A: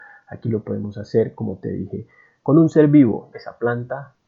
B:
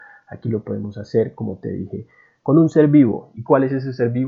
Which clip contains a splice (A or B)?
A